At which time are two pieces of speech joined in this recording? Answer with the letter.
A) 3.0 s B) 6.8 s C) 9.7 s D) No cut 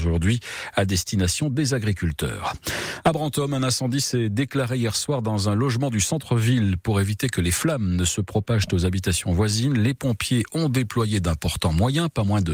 D